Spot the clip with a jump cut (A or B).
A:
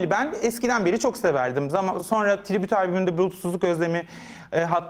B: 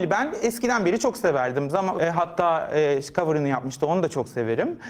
B